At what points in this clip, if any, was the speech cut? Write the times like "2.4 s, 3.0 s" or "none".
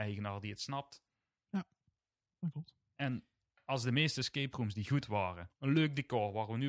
5.5 s

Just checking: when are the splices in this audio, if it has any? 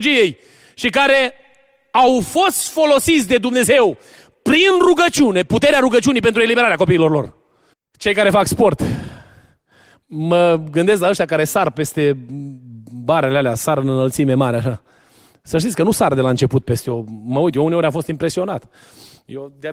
7.7 s

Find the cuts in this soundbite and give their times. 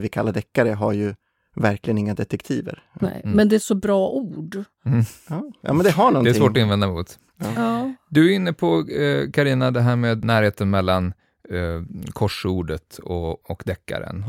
none

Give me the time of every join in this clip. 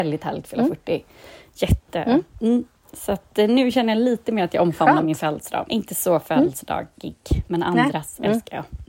5.6 s, 7.4 s

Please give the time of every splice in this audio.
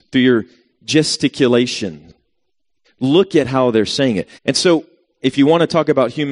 2.8 s, 4.4 s

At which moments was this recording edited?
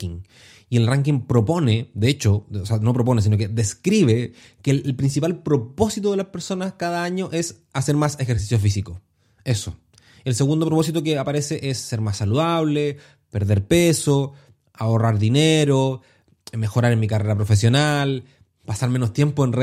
none

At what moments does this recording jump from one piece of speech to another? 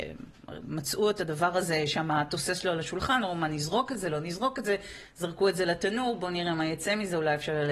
none

